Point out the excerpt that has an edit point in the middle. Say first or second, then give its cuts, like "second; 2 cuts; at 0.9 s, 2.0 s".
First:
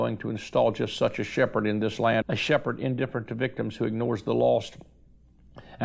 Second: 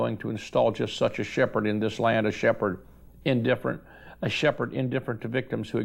first; 1 cut; at 2.2 s